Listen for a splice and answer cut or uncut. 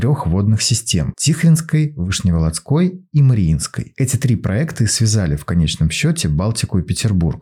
uncut